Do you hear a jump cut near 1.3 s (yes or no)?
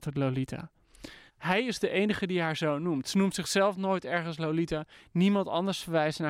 yes